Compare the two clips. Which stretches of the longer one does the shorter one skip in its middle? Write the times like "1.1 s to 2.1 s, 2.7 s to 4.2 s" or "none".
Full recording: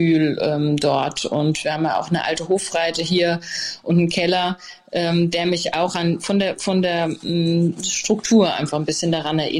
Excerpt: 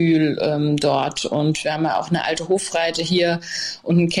none